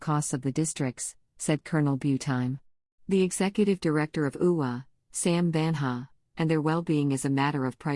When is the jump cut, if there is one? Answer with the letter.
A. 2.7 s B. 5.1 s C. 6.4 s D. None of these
C